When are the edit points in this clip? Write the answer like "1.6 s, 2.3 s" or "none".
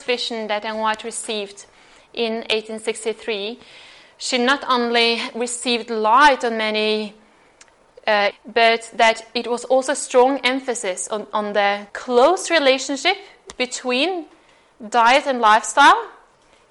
8.3 s, 11.9 s